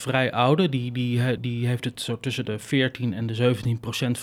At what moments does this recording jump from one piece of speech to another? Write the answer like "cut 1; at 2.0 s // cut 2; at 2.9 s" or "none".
cut 1; at 1.4 s